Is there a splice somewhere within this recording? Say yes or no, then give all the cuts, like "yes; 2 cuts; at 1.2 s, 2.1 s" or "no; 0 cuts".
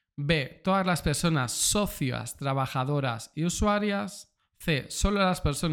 no; 0 cuts